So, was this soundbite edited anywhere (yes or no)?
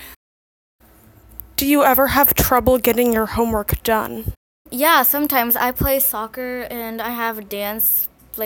no